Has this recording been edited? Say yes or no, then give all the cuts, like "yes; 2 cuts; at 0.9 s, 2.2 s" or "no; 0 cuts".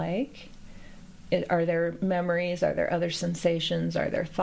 yes; 1 cut; at 1.3 s